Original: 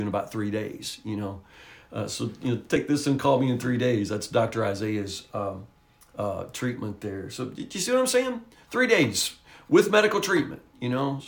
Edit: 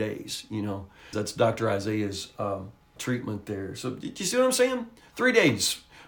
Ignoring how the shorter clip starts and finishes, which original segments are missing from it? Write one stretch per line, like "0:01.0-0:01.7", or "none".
0:01.7-0:04.1
0:05.9-0:06.5